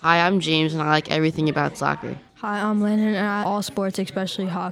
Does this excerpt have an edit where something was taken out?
yes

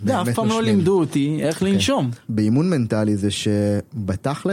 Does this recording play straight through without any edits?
no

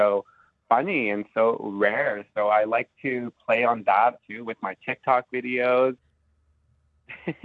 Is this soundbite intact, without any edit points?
no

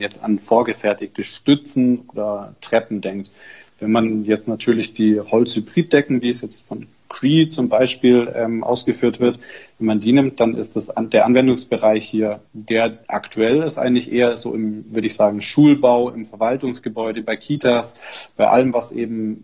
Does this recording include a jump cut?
no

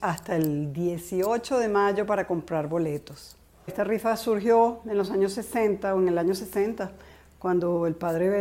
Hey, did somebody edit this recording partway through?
yes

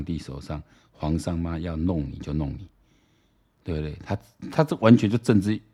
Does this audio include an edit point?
no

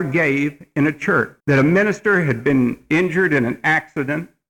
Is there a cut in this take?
yes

